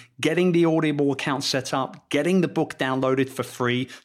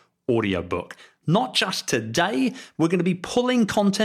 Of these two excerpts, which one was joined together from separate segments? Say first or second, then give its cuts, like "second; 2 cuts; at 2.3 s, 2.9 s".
second; 2 cuts; at 1.2 s, 2.7 s